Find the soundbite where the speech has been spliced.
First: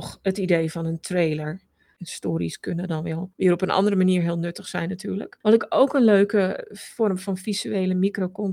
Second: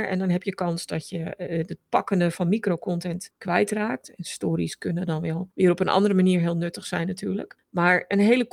first; 2 cuts; at 2.0 s, 5.4 s

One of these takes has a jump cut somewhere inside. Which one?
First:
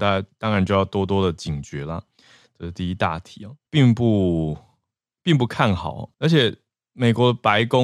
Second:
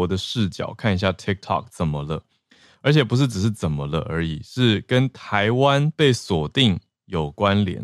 first; 2 cuts; at 3.7 s, 6.1 s

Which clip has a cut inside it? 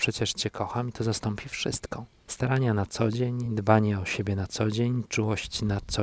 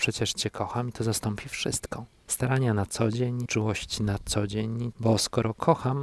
second; 2 cuts; at 3.5 s, 4.9 s

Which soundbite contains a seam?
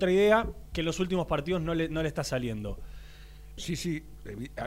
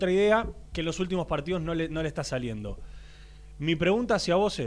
first; 1 cut; at 3.6 s

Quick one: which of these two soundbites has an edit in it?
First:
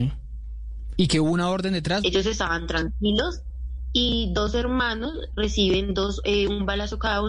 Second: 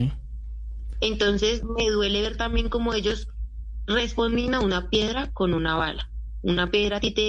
first; 2 cuts; at 0.9 s, 2.0 s

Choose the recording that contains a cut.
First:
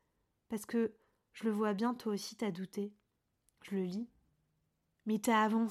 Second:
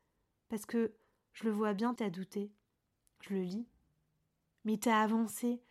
second; 1 cut; at 2.0 s

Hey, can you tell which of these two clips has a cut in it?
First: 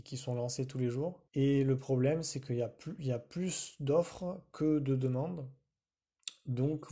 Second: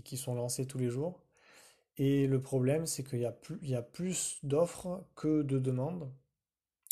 first; 1 cut; at 1.3 s

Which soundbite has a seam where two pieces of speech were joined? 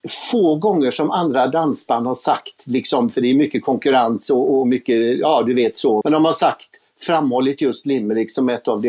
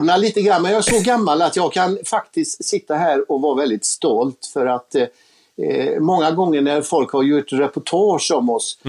first; 1 cut; at 6.0 s

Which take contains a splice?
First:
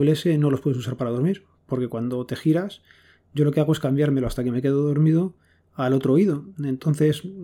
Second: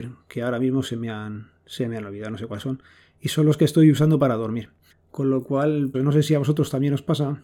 second; 2 cuts; at 4.9 s, 5.9 s

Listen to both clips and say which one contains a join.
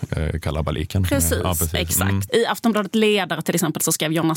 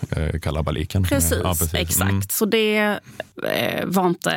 first; 1 cut; at 2.3 s

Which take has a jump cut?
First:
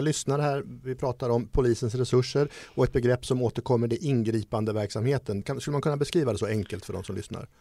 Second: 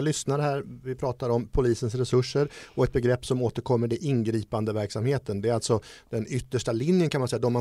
first; 1 cut; at 5.4 s

